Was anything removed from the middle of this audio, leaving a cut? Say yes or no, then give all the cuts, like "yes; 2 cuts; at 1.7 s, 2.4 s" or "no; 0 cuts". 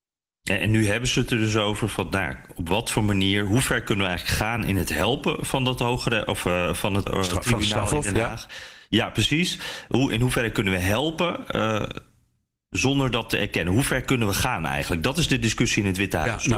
yes; 1 cut; at 7.1 s